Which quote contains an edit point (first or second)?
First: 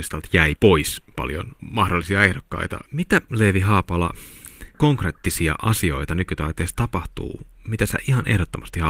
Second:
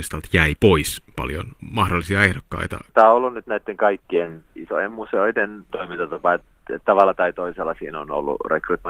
first